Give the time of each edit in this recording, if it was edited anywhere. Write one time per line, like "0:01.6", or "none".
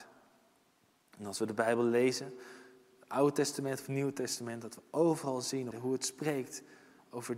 0:05.7